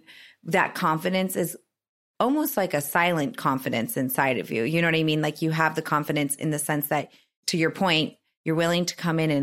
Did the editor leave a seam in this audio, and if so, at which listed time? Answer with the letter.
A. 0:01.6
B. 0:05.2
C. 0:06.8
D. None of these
D